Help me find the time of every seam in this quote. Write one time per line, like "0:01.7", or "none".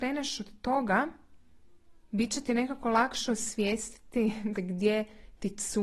0:04.5